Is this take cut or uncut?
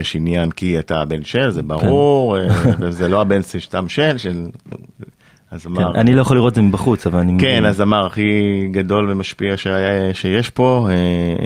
uncut